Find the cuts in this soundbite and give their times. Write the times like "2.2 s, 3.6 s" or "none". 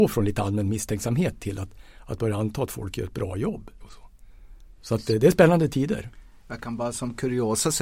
3.8 s